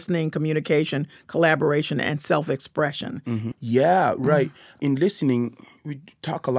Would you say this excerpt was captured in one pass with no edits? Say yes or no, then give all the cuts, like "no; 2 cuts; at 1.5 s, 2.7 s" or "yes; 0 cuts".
no; 1 cut; at 3.5 s